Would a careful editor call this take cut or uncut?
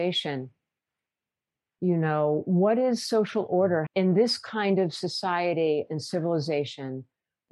cut